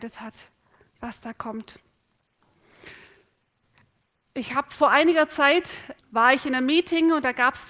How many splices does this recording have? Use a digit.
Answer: 1